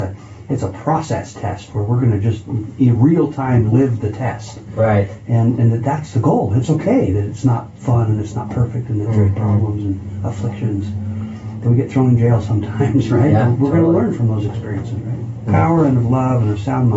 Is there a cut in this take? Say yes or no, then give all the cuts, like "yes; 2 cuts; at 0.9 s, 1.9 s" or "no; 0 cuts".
yes; 1 cut; at 15.5 s